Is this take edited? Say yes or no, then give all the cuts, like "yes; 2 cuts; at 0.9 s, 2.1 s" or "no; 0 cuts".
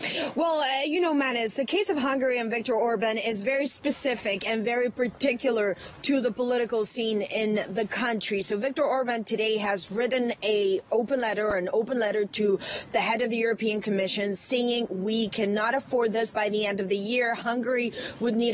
no; 0 cuts